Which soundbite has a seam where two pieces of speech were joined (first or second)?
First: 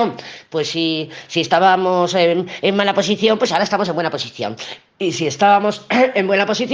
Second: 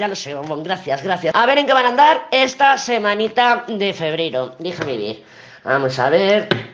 second